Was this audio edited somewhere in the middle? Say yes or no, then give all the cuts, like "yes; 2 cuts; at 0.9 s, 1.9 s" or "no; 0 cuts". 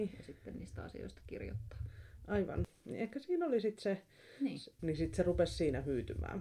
yes; 1 cut; at 4.8 s